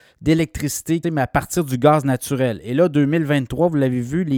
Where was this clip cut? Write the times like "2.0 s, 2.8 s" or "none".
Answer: 1.0 s